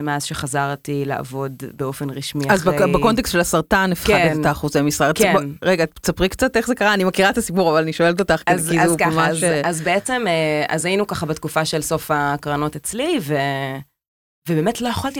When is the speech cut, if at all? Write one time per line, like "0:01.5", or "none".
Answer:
none